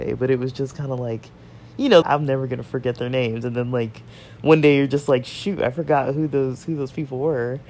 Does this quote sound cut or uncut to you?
cut